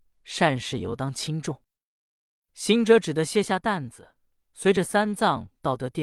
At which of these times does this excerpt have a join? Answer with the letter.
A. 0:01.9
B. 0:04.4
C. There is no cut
A